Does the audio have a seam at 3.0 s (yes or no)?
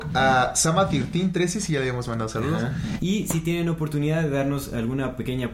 yes